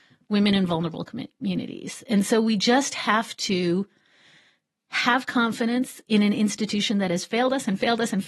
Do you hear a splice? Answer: no; 0 cuts

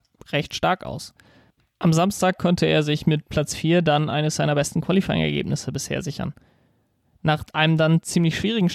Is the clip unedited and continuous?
yes; 0 cuts

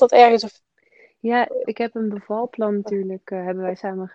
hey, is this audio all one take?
no; 1 cut; at 1.7 s

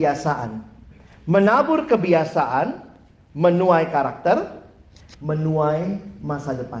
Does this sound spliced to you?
yes; 1 cut; at 5.1 s

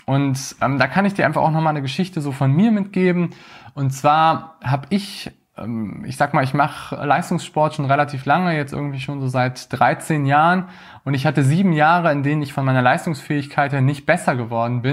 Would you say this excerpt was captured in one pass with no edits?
yes; 0 cuts

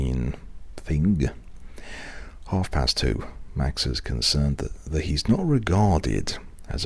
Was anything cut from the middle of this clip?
no; 0 cuts

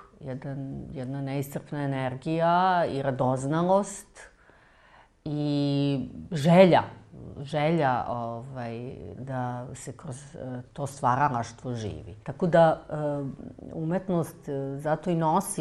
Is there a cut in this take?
yes; 3 cuts; at 9.2 s, 10.6 s, 12.2 s

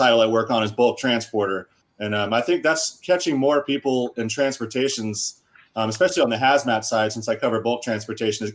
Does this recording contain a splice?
yes; 1 cut; at 1.8 s

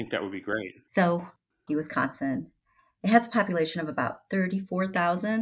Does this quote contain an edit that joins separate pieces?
yes; 1 cut; at 1.7 s

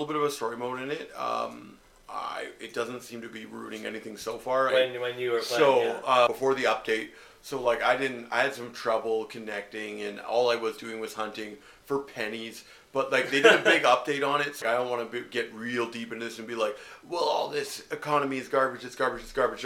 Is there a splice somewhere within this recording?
yes; 3 cuts; at 4.7 s, 6.3 s, 14.6 s

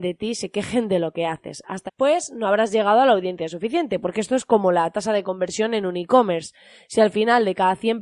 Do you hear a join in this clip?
yes; 1 cut; at 1.9 s

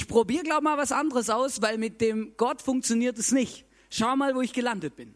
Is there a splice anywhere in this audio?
no; 0 cuts

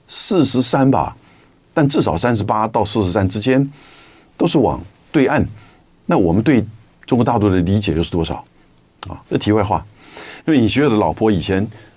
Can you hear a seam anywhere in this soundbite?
yes; 2 cuts; at 9.2 s, 10.4 s

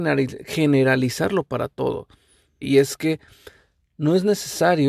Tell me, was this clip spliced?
yes; 1 cut; at 2.6 s

